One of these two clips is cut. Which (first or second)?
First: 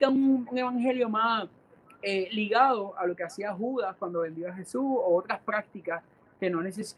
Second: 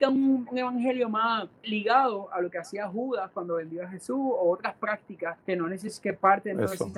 second